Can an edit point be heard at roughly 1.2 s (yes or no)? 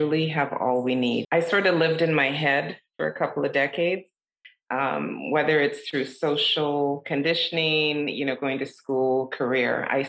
yes